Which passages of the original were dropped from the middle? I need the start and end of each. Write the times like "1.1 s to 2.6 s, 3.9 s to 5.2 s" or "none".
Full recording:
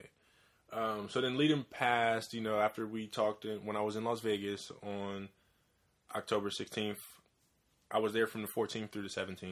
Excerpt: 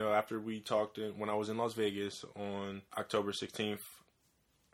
5.3 s to 6.1 s